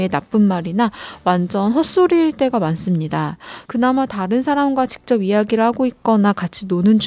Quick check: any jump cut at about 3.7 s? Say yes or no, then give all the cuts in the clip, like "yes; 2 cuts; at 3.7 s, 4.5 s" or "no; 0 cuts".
yes; 1 cut; at 3.7 s